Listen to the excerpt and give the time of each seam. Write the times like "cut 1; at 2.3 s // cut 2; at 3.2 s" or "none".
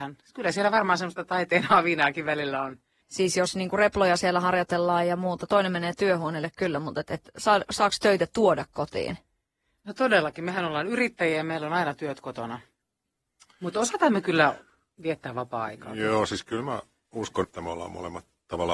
cut 1; at 3.0 s // cut 2; at 17.4 s